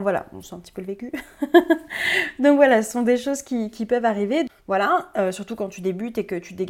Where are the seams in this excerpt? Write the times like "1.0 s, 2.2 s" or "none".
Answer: 4.5 s